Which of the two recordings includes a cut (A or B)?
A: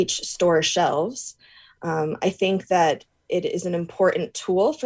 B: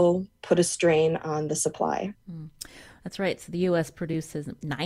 B